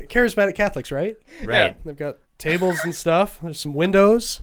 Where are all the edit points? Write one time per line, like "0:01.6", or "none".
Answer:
0:01.8